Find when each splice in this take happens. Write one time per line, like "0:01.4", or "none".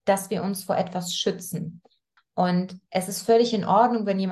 0:02.2